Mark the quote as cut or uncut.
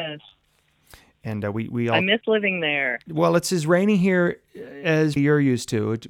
cut